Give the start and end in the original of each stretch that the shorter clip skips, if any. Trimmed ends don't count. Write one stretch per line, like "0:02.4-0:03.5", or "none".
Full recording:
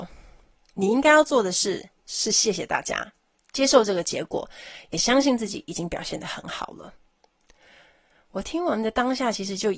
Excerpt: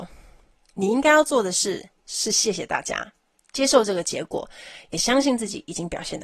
none